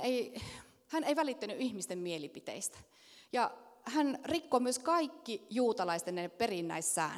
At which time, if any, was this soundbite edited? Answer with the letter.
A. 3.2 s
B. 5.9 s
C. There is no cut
C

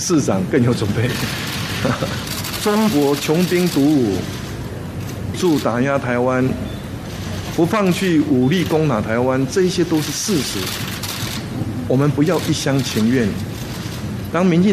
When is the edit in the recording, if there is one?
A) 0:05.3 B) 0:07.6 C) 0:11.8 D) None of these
A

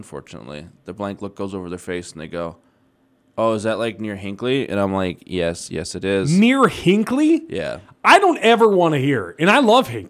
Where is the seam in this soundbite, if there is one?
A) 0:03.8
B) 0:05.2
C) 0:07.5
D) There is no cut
D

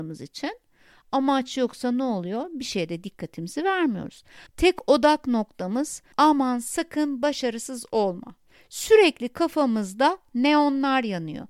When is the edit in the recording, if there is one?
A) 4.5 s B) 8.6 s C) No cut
A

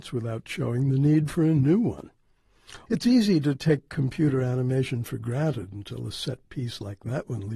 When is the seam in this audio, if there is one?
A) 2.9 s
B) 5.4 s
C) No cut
A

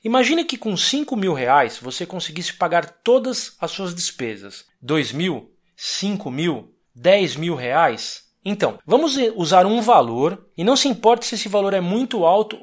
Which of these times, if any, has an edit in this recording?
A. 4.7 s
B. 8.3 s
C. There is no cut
A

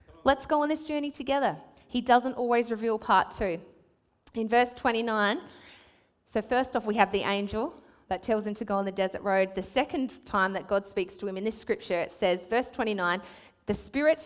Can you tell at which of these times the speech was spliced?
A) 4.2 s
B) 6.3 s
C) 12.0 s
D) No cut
D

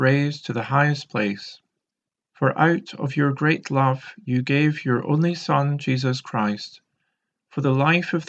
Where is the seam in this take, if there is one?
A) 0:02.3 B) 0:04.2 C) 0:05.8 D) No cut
A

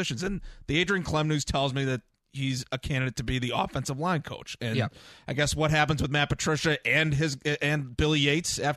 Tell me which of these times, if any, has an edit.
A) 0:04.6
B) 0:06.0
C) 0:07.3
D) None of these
D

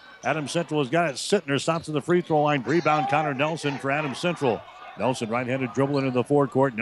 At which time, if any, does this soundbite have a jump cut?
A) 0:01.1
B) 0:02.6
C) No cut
B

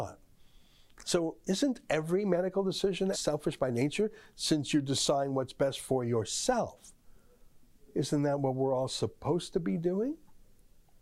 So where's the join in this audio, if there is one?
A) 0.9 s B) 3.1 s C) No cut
B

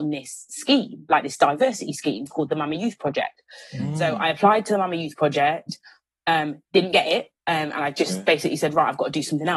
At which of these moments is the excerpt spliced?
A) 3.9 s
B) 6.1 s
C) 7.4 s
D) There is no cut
C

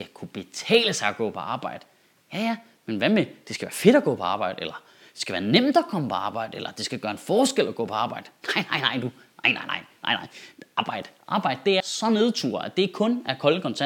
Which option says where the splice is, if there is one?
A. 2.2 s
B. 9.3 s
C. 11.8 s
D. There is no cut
C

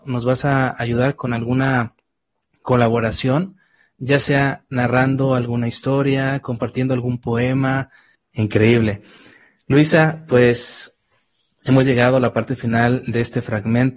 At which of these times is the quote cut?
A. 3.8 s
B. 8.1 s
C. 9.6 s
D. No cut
B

